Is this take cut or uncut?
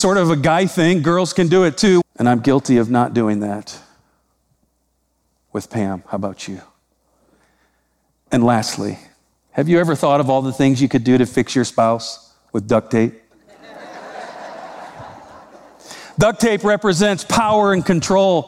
cut